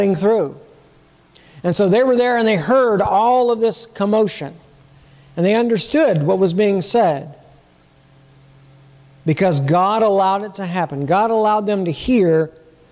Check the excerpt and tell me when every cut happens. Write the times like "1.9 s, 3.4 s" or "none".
none